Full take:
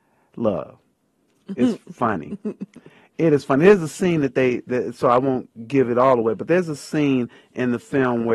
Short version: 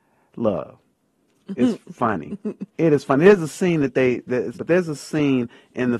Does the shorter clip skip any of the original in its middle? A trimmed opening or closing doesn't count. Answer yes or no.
yes